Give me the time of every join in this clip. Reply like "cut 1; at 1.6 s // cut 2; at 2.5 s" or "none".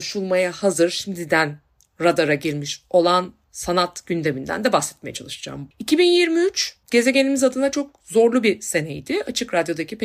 cut 1; at 5.7 s // cut 2; at 6.8 s